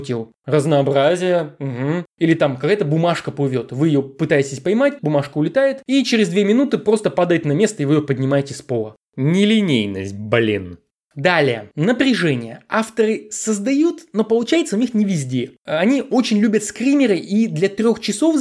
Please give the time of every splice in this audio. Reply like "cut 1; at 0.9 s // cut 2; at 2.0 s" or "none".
cut 1; at 5.0 s